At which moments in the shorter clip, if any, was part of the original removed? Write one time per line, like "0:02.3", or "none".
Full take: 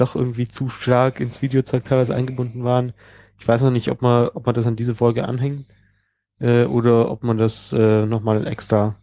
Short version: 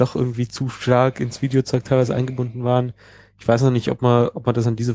none